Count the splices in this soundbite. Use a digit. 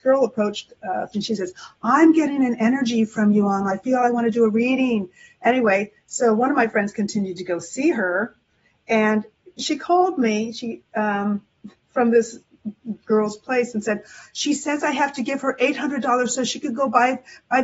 1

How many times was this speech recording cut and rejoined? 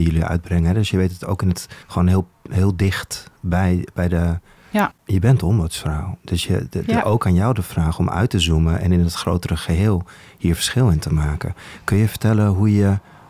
2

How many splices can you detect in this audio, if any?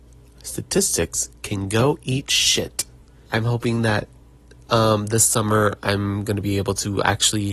1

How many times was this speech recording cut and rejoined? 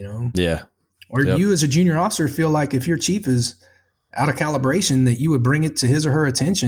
0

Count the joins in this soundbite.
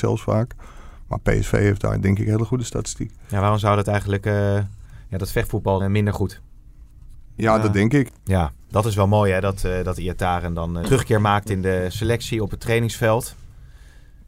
3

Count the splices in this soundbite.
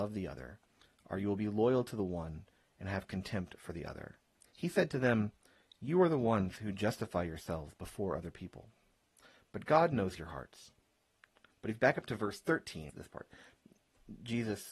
3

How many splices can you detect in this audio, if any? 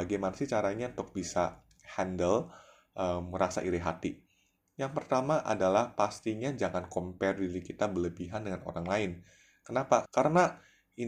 1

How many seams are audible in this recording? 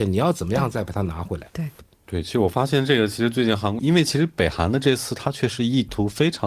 2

